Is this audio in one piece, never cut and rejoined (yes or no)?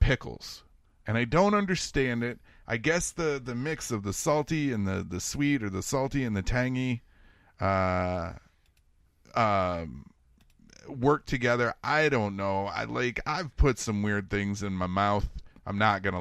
yes